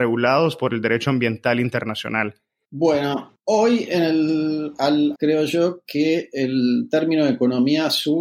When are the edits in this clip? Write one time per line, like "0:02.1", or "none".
0:02.6
0:05.2